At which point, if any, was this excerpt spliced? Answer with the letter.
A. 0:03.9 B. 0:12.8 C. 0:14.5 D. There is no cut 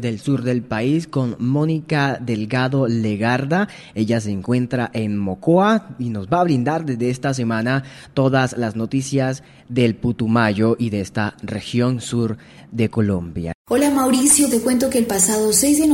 C